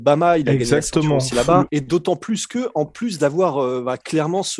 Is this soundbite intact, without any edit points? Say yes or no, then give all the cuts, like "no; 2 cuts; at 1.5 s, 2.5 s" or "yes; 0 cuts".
no; 1 cut; at 1.7 s